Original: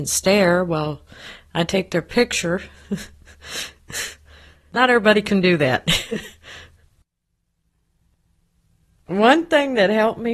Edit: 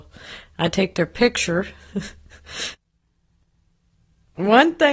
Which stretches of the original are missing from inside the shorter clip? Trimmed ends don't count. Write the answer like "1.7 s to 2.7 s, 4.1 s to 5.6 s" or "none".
3.7 s to 7.4 s